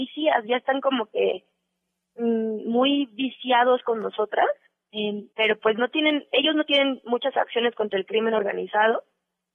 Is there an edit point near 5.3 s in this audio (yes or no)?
yes